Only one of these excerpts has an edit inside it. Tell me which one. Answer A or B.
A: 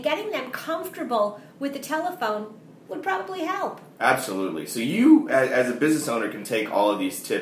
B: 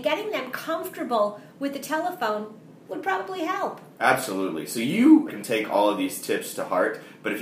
B